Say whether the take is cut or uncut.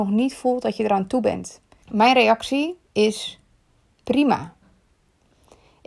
cut